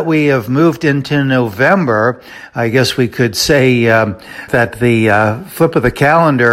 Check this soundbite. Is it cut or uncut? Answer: cut